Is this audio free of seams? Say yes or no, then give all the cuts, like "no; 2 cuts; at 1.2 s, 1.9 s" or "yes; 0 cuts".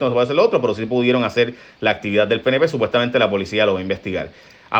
yes; 0 cuts